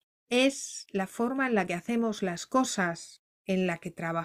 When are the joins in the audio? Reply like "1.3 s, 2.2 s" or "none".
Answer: none